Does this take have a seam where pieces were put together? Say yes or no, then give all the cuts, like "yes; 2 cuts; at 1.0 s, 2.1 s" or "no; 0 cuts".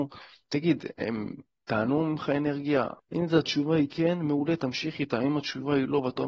yes; 1 cut; at 3.0 s